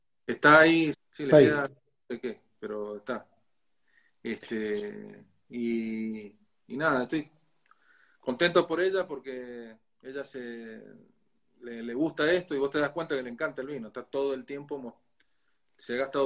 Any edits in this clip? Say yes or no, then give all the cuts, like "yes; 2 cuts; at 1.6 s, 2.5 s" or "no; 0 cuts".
yes; 1 cut; at 0.9 s